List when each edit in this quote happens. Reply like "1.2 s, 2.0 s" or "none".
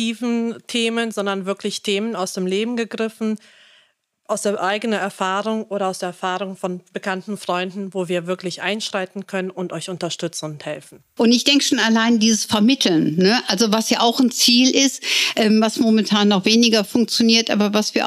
11.2 s